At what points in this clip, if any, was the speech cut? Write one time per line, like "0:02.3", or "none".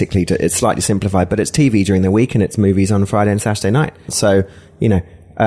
0:04.1